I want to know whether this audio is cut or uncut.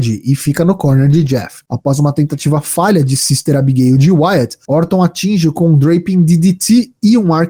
cut